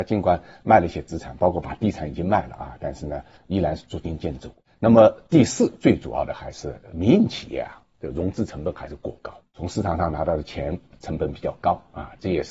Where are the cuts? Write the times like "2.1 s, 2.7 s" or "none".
none

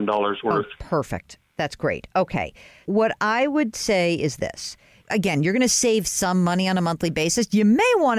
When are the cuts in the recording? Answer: 2.9 s

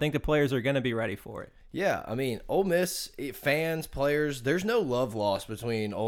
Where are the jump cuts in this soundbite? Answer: none

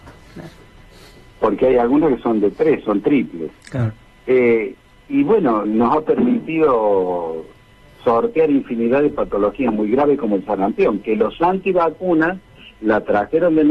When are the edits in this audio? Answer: 3.6 s, 5.6 s

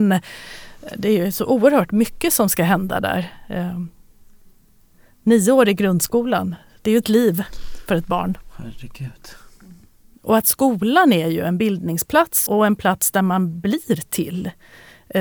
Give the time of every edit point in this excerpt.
10.1 s, 12.5 s

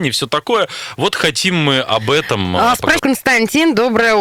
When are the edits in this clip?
3.0 s

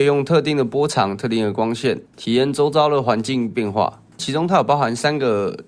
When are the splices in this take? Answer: 2.1 s, 4.1 s

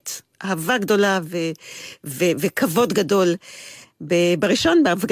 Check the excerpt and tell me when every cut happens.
3.8 s

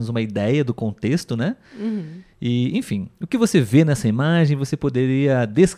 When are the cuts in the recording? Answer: none

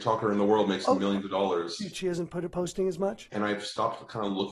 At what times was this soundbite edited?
1.9 s, 3.3 s

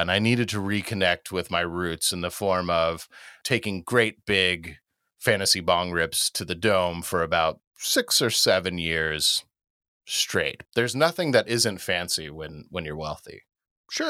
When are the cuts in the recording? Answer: 3.4 s, 10.7 s

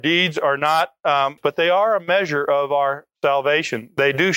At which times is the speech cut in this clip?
1.4 s

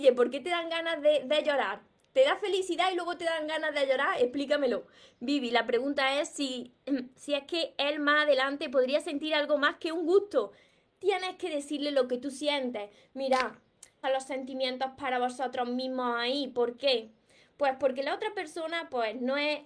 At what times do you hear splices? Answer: 14.0 s

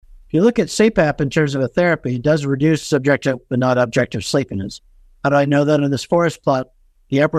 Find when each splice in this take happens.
none

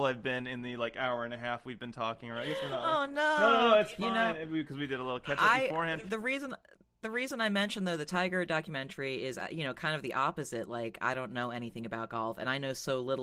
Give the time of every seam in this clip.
none

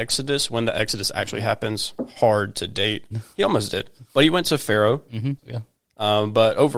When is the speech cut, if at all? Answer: 3.1 s, 5.4 s

